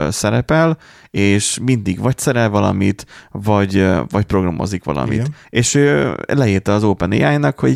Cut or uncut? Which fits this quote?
cut